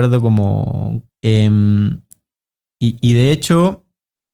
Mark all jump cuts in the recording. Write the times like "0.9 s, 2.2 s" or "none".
1.1 s

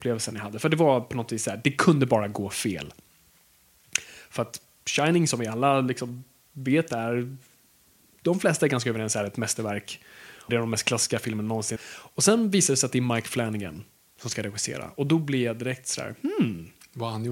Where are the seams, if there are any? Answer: 10.5 s, 11.8 s

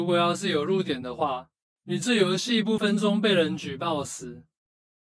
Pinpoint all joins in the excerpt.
2.8 s

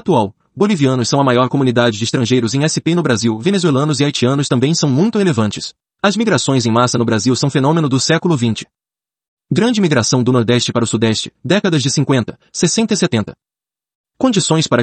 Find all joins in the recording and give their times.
5.9 s

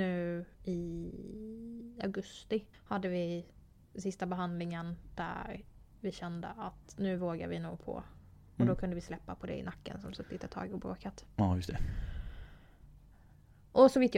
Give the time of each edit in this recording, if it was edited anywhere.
2.7 s

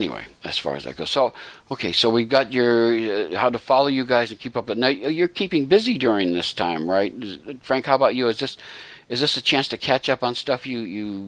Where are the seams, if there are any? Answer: none

